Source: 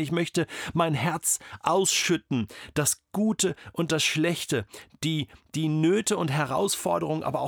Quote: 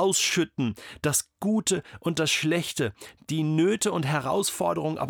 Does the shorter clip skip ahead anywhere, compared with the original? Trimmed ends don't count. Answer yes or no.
yes